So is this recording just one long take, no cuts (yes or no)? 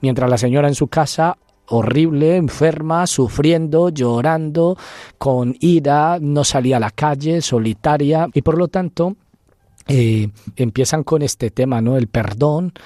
no